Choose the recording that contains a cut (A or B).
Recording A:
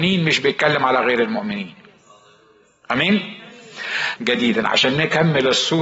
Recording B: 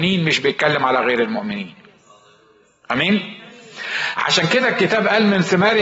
A